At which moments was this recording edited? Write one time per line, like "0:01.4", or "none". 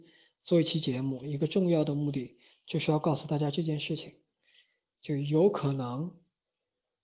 none